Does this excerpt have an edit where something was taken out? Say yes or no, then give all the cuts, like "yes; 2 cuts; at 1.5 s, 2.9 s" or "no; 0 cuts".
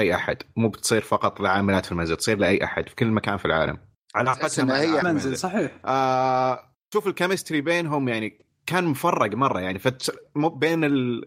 yes; 1 cut; at 5.0 s